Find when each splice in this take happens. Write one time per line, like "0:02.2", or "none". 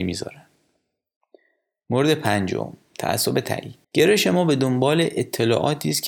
0:03.8